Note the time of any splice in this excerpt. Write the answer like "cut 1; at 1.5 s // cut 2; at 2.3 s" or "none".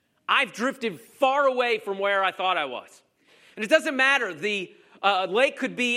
none